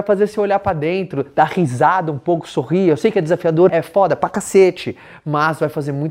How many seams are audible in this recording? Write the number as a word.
one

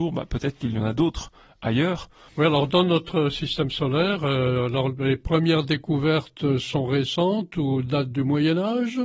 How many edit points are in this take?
one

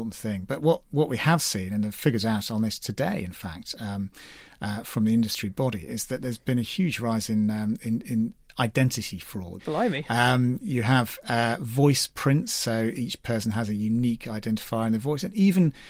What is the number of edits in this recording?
one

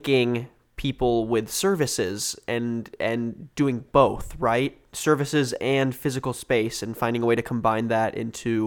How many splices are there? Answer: zero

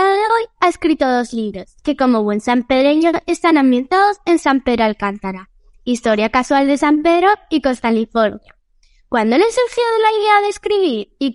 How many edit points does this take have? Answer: zero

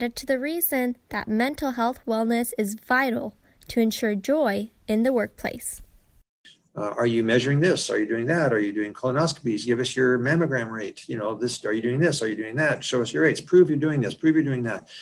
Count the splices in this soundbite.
one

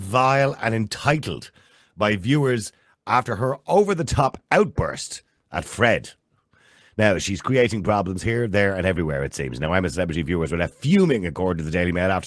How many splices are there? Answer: zero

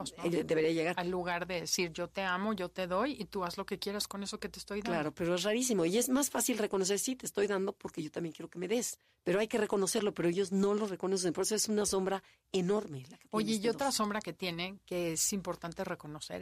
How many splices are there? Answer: zero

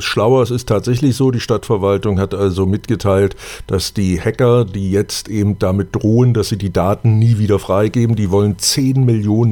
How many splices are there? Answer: zero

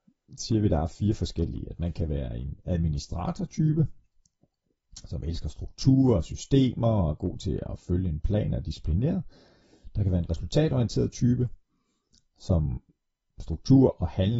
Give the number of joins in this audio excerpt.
zero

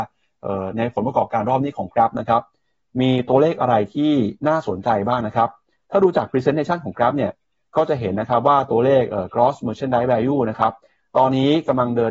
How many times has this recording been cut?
one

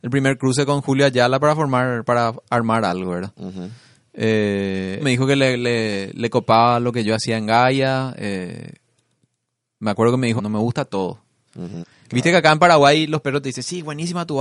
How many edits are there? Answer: three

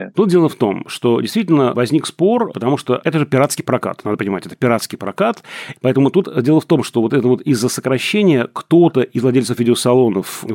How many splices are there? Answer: one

